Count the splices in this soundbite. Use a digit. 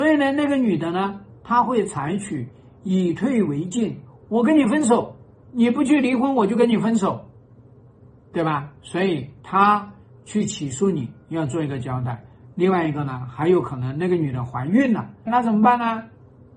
2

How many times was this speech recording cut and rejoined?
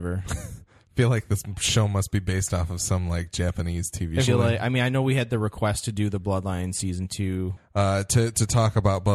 2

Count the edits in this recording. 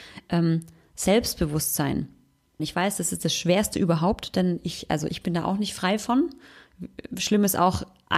1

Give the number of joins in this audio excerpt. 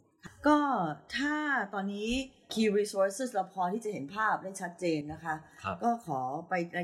0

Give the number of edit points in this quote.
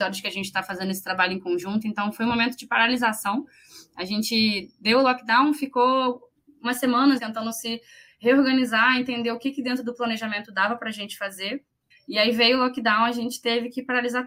2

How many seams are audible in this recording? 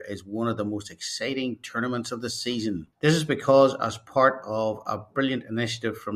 1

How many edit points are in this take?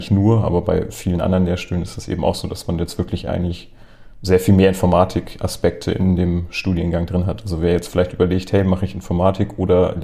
0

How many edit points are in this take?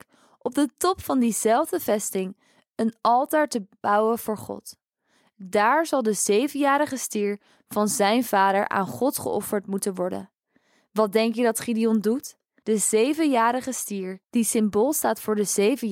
1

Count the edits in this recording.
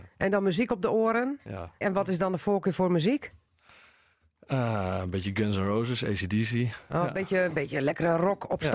1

